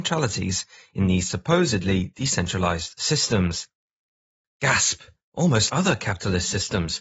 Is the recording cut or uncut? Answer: cut